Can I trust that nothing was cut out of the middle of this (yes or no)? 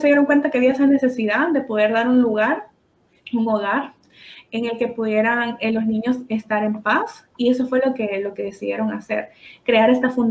yes